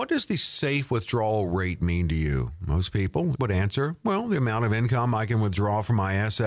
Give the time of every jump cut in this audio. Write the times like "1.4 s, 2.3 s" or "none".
3.3 s